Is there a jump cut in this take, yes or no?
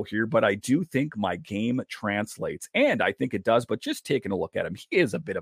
no